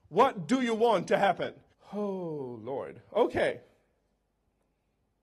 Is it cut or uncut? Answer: cut